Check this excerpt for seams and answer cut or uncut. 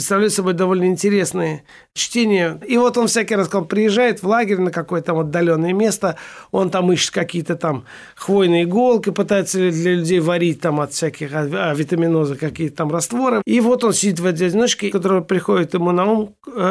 cut